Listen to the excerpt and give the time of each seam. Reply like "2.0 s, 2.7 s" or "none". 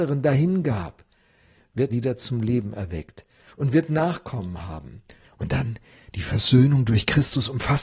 1.9 s, 5.2 s